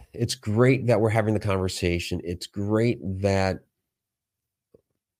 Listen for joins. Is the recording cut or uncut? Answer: uncut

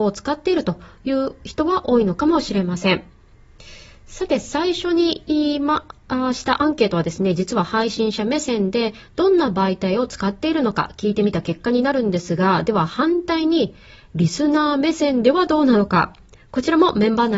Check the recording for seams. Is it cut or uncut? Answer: uncut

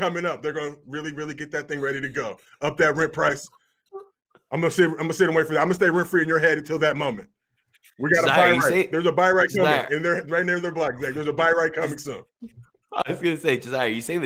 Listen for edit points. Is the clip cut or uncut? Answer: uncut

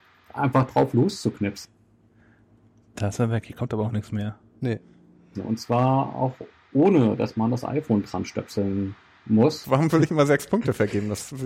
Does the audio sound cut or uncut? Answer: cut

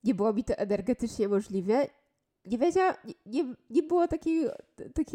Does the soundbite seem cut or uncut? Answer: uncut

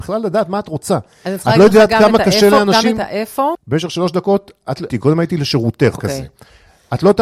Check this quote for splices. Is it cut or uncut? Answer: cut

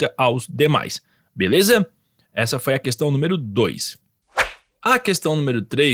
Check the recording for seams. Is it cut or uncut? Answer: uncut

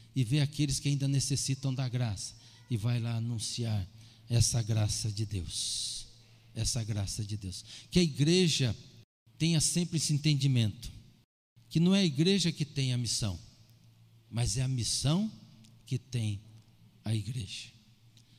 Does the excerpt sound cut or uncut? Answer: uncut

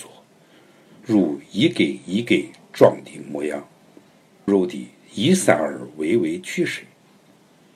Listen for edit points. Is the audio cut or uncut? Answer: cut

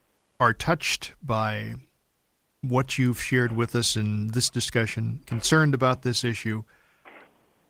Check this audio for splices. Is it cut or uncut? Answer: cut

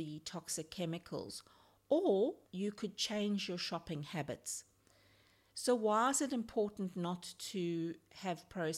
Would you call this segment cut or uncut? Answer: cut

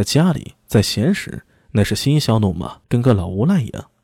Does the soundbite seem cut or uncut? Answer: cut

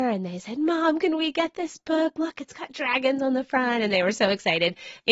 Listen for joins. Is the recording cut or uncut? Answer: uncut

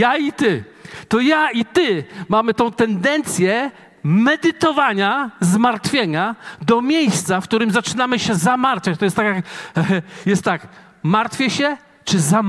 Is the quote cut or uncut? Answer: uncut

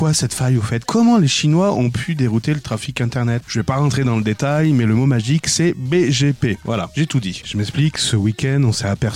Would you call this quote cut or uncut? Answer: cut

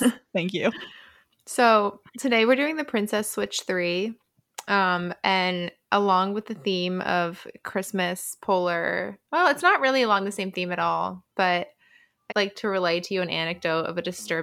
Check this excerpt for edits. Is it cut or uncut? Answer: cut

